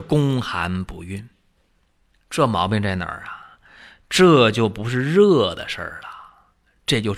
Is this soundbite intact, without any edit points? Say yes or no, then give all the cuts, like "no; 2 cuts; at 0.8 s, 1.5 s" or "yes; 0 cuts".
yes; 0 cuts